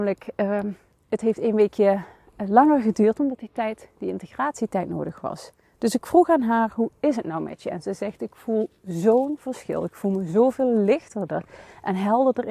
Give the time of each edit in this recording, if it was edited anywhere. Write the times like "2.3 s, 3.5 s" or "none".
none